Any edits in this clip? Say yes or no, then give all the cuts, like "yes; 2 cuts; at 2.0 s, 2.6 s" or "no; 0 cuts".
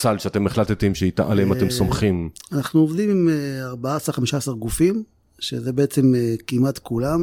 no; 0 cuts